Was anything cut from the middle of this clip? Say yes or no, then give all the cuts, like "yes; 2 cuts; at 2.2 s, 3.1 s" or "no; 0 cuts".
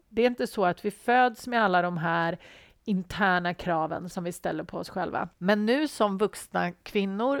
yes; 2 cuts; at 4.1 s, 5.3 s